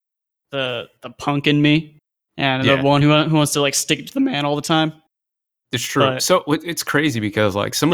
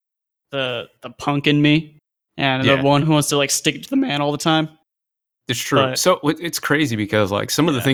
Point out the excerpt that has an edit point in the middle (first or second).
second